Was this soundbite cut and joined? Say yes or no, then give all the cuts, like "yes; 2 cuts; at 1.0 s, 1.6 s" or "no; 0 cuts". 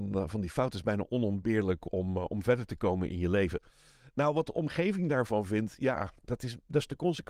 no; 0 cuts